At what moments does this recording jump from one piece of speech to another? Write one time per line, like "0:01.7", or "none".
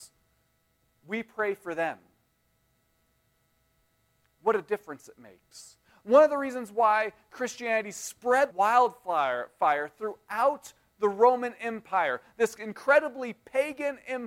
0:08.5